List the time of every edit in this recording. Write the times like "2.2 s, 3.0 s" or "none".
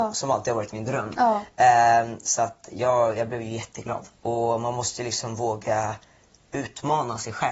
4.2 s